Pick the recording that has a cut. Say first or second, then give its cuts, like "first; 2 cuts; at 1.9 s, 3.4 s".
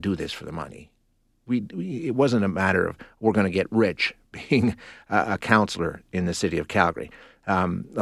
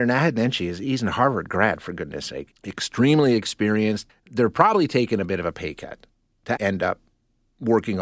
second; 3 cuts; at 2.5 s, 4.1 s, 6.6 s